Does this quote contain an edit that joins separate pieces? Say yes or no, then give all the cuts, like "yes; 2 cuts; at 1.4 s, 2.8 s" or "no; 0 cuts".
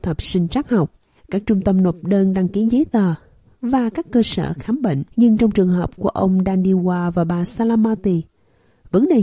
yes; 2 cuts; at 1.2 s, 5.1 s